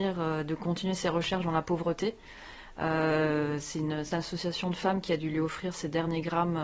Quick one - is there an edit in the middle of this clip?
no; 0 cuts

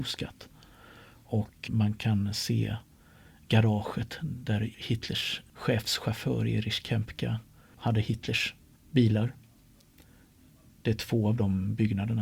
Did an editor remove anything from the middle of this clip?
yes; 1 cut; at 1.7 s

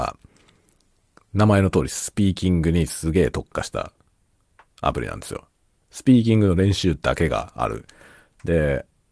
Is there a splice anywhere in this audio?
no; 0 cuts

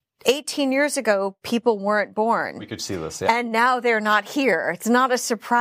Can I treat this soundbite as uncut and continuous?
yes; 0 cuts

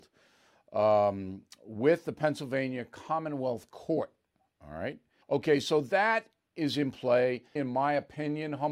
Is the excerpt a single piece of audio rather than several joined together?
no; 2 cuts; at 5.2 s, 7.6 s

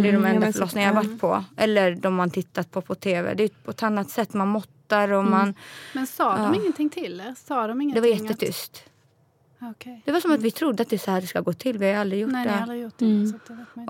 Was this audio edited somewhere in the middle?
no; 0 cuts

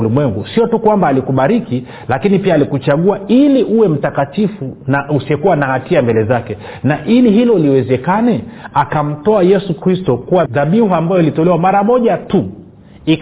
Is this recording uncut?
no; 1 cut; at 10.5 s

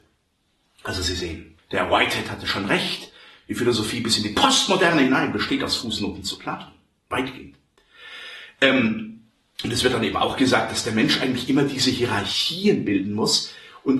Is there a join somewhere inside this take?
yes; 1 cut; at 1.6 s

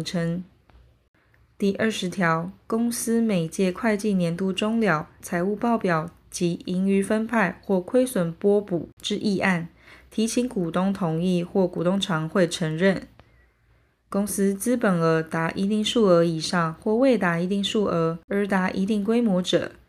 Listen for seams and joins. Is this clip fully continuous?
no; 1 cut; at 5.2 s

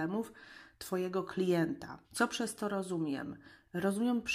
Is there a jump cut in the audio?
yes; 1 cut; at 2.0 s

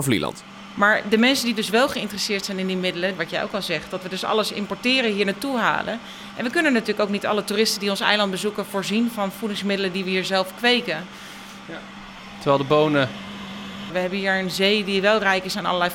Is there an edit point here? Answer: yes; 3 cuts; at 3.2 s, 11.6 s, 13.9 s

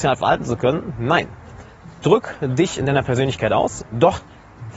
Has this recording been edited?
no; 0 cuts

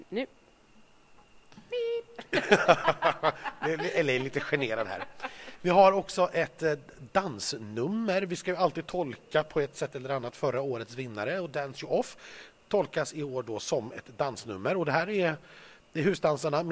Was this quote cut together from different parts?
no; 0 cuts

